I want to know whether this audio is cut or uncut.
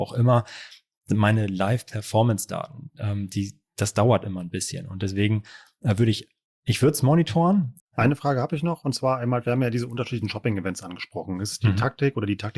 cut